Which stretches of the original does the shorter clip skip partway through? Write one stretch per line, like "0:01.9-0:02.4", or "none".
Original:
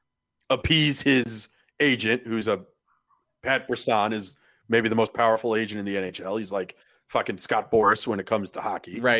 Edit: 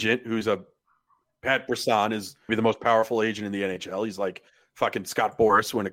0:04.5-0:04.8